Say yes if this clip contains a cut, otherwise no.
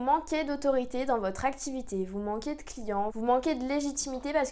yes